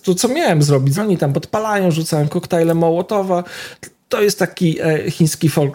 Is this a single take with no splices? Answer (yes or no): no